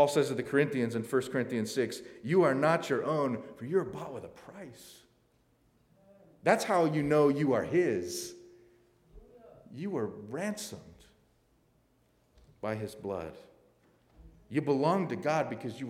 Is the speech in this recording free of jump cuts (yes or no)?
yes